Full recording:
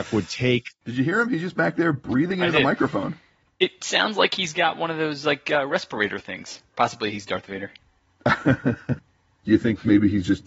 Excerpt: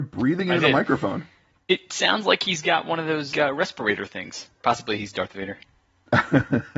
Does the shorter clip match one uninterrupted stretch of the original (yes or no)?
no